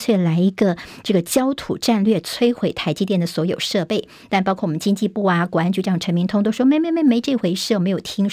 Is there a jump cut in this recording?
no; 0 cuts

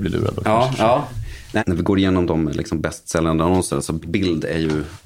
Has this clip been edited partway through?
yes; 1 cut; at 1.6 s

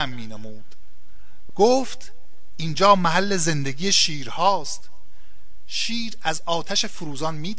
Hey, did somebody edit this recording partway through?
yes; 1 cut; at 1.5 s

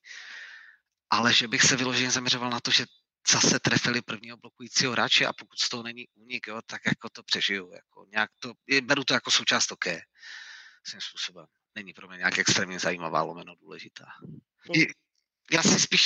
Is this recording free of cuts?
no; 2 cuts; at 11.7 s, 14.7 s

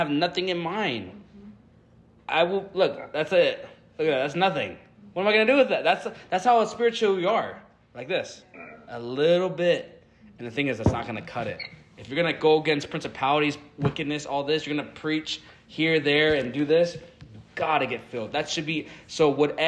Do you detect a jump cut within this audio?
no; 0 cuts

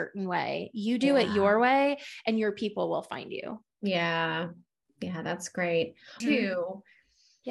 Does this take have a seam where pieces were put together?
yes; 1 cut; at 6.2 s

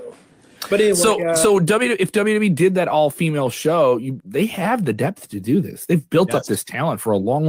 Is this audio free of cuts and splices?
no; 1 cut; at 4.2 s

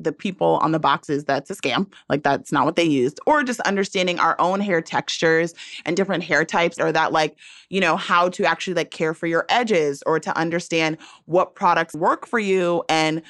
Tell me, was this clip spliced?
yes; 2 cuts; at 6.8 s, 11.9 s

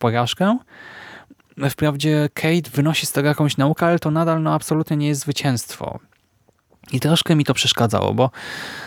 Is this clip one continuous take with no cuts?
yes; 0 cuts

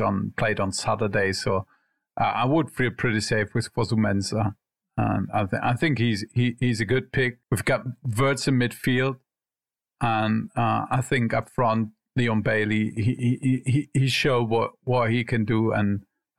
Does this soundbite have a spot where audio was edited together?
yes; 1 cut; at 7.4 s

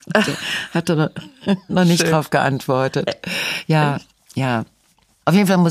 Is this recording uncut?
no; 1 cut; at 1.7 s

